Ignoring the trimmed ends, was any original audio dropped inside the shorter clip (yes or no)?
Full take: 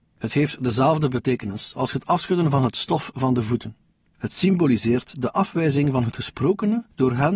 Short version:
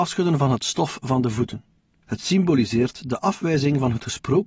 no